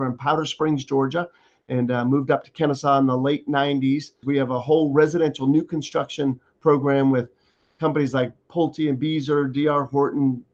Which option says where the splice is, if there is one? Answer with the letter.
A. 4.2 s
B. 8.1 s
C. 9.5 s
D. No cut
A